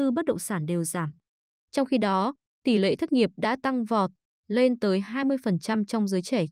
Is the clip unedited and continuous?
yes; 0 cuts

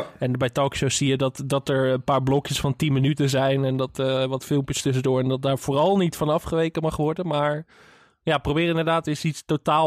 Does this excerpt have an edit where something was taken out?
no; 0 cuts

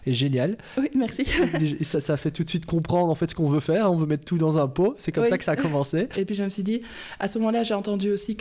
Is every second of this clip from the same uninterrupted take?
no; 2 cuts; at 1.9 s, 6.1 s

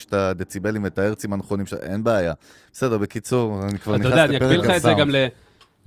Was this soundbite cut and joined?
no; 0 cuts

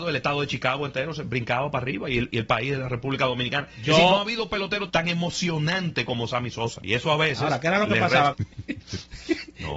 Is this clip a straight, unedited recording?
no; 3 cuts; at 4.9 s, 6.8 s, 8.3 s

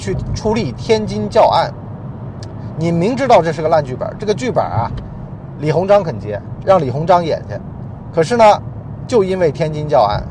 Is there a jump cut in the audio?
no; 0 cuts

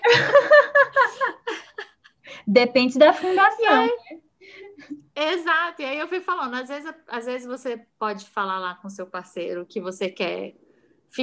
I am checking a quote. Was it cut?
no; 0 cuts

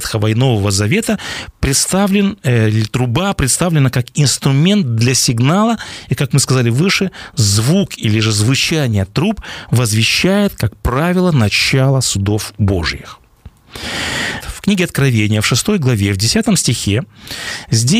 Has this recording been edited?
yes; 1 cut; at 14.4 s

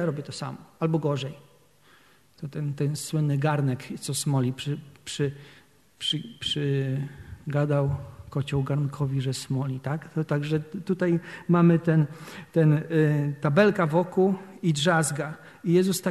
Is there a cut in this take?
no; 0 cuts

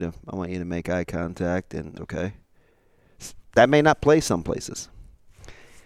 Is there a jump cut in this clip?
yes; 1 cut; at 2.0 s

